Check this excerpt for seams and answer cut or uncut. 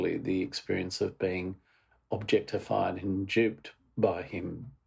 uncut